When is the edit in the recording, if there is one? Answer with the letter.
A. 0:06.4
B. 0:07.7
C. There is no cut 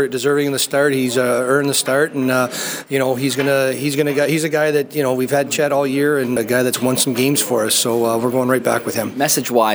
A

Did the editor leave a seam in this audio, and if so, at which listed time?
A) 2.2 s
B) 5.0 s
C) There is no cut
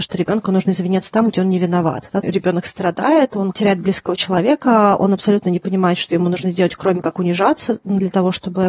A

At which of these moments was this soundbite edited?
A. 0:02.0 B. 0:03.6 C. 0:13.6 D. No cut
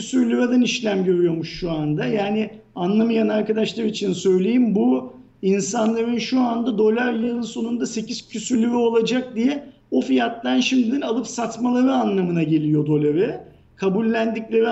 D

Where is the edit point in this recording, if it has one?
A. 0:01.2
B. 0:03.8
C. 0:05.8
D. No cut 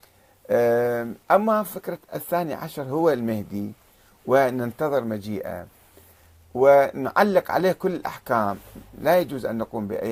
A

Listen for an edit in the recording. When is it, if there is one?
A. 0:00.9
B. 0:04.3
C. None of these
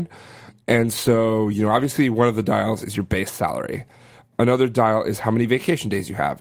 B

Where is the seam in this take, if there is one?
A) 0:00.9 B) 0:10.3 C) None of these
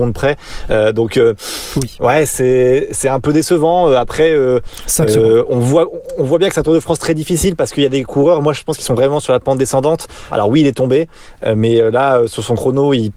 B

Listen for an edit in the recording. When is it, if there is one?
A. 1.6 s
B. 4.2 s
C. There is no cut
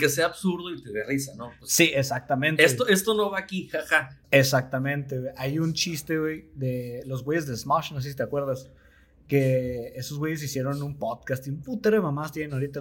B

